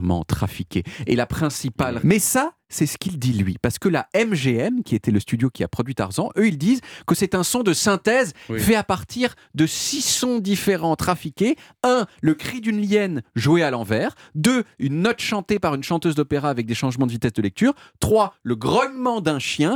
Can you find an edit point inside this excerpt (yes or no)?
yes